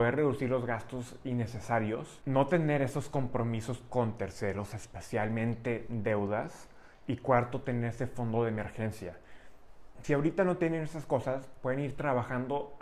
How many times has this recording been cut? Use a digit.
0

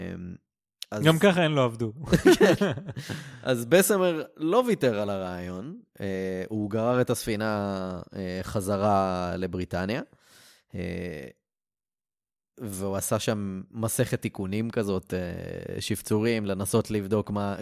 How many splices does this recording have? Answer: 0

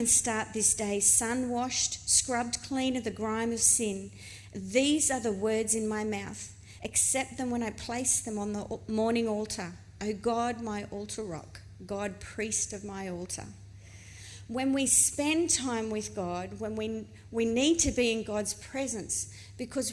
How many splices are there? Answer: 1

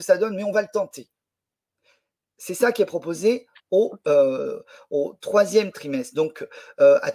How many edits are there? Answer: 0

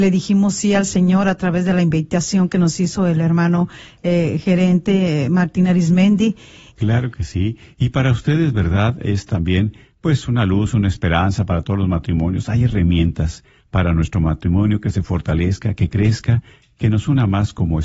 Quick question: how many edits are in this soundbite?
1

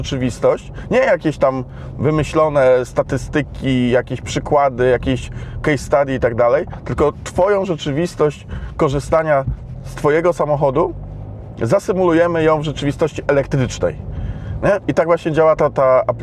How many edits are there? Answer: 0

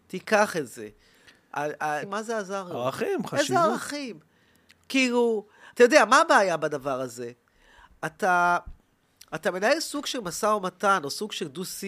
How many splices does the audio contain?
1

